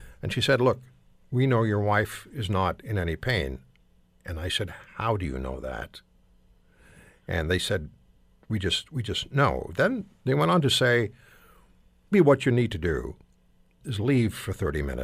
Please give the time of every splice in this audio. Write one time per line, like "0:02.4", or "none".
0:12.1
0:13.8